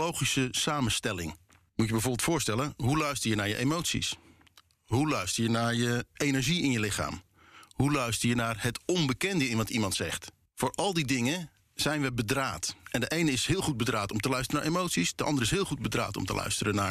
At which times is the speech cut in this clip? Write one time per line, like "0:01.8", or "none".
none